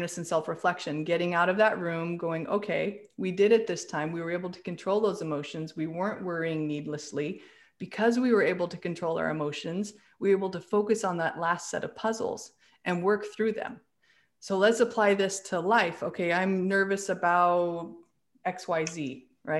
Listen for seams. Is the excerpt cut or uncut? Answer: uncut